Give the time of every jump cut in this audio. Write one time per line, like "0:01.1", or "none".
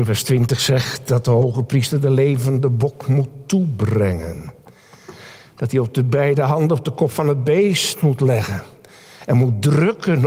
none

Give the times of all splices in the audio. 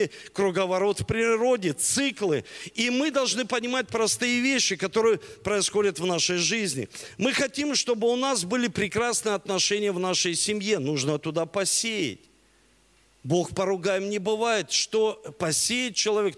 none

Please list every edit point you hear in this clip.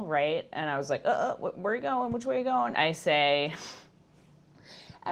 0:02.7

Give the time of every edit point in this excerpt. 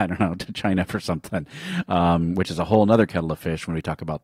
none

